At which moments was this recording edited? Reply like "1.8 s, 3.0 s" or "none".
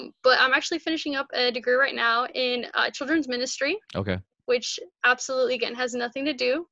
3.8 s